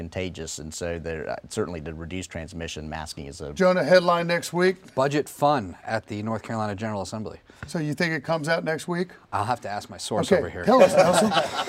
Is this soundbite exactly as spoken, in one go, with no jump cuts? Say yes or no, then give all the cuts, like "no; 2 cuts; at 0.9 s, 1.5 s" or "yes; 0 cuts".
yes; 0 cuts